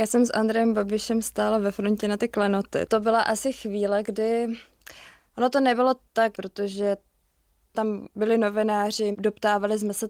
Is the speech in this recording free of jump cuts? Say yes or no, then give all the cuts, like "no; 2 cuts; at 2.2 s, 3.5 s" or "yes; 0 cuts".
no; 2 cuts; at 6.3 s, 9.1 s